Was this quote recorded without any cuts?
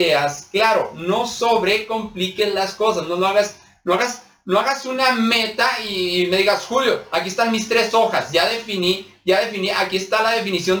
yes; 0 cuts

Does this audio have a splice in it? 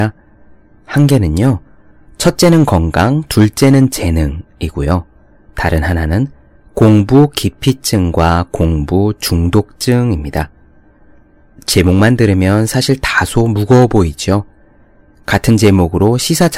no; 0 cuts

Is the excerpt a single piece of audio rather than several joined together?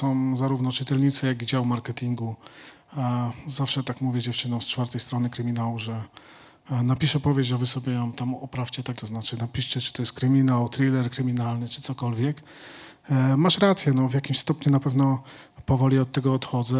no; 1 cut; at 8.9 s

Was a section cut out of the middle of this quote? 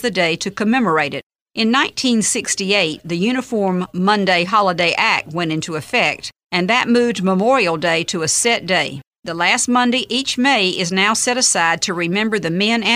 no; 0 cuts

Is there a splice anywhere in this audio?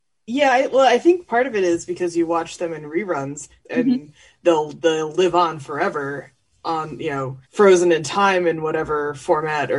yes; 2 cuts; at 3.6 s, 7.5 s

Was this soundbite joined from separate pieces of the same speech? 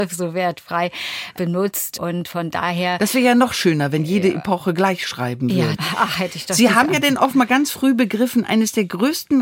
yes; 1 cut; at 5.7 s

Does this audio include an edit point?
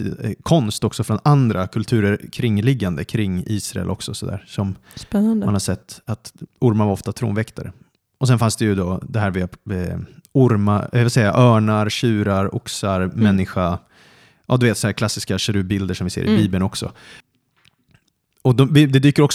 no; 0 cuts

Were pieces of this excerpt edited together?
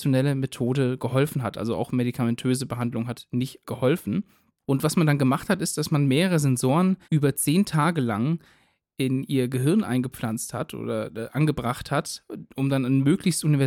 yes; 1 cut; at 7.0 s

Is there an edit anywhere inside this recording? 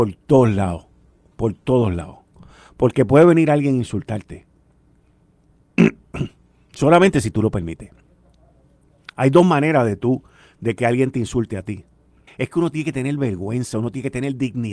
yes; 2 cuts; at 5.8 s, 12.3 s

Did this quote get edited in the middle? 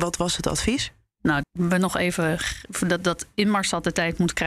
yes; 1 cut; at 1.4 s

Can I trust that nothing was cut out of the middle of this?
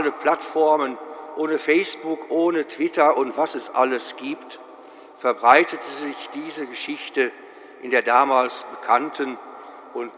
yes; 0 cuts

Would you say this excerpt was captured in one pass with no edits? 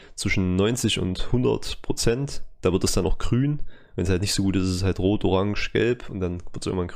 yes; 0 cuts

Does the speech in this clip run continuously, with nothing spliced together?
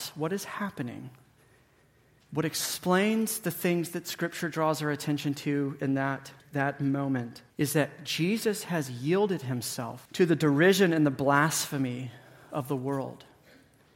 no; 3 cuts; at 6.4 s, 7.5 s, 10.1 s

